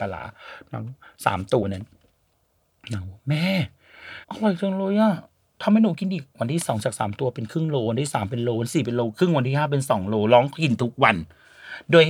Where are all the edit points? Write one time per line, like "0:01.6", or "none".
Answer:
0:01.6
0:04.2